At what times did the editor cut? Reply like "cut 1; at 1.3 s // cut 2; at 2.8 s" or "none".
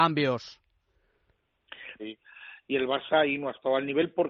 cut 1; at 2.0 s